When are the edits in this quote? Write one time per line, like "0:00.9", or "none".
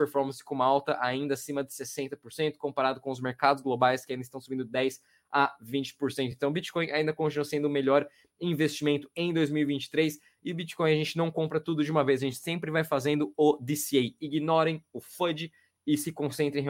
none

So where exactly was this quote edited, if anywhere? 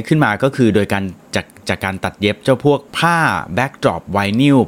0:02.9

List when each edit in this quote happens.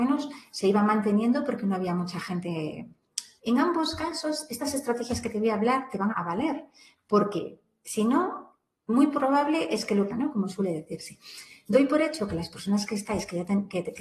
0:03.4
0:06.1
0:10.1

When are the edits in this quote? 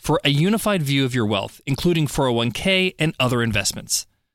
none

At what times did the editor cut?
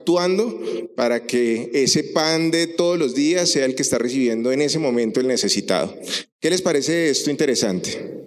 0:06.2

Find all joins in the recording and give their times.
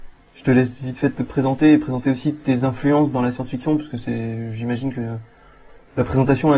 none

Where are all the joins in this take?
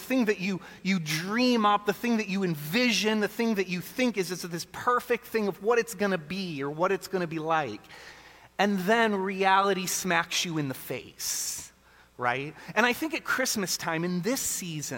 none

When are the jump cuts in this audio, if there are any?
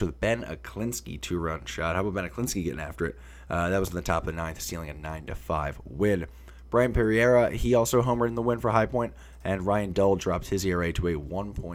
none

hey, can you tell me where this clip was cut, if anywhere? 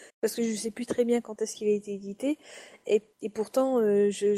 0:03.1

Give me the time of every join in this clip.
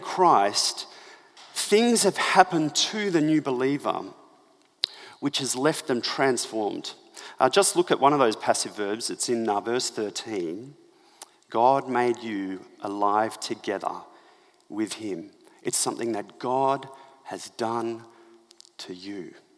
none

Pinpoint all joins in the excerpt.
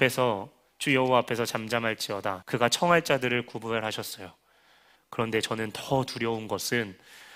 0:02.4
0:05.0

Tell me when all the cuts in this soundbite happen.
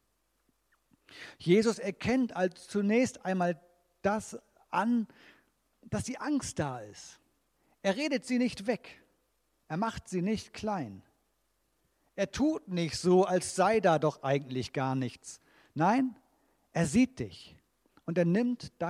none

